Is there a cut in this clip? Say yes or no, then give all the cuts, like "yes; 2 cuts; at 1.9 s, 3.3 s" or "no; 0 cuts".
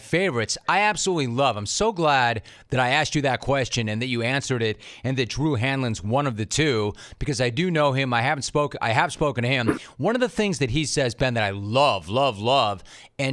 no; 0 cuts